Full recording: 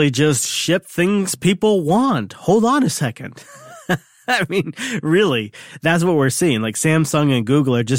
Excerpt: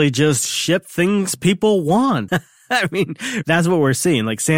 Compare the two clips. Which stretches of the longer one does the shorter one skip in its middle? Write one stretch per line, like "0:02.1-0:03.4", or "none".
0:02.3-0:03.9
0:05.0-0:05.8